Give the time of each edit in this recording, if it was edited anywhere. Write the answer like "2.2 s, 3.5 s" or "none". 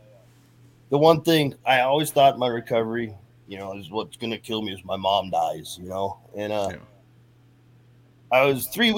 none